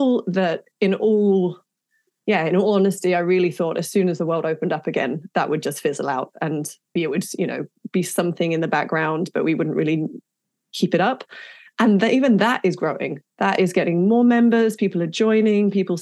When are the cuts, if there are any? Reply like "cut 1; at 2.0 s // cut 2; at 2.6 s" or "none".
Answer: cut 1; at 7.0 s